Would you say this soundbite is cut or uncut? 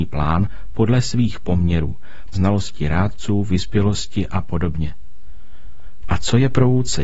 cut